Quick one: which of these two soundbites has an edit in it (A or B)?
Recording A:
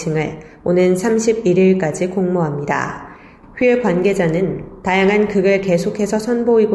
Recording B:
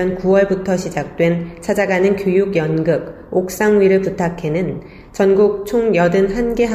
A